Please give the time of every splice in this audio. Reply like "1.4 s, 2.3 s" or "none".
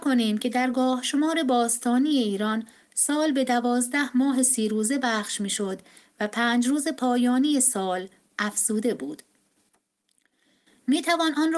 none